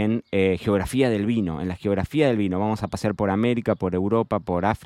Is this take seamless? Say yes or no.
yes